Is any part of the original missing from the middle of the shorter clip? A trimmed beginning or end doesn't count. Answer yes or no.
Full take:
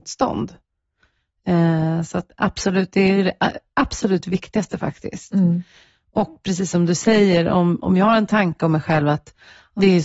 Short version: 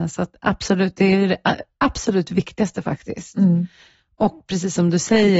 no